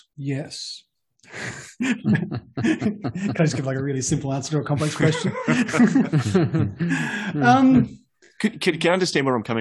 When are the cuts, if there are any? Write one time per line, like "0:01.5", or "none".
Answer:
none

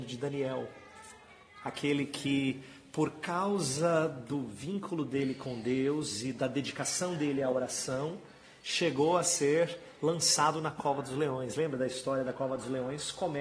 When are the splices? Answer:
none

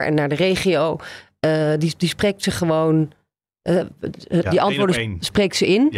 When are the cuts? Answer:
none

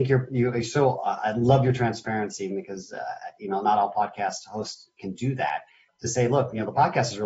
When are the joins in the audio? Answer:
none

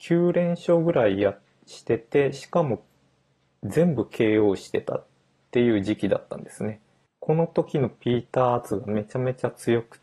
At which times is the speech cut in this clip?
0:07.1

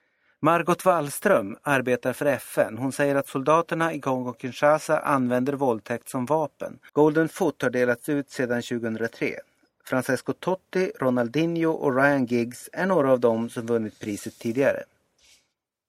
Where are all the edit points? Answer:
0:06.9

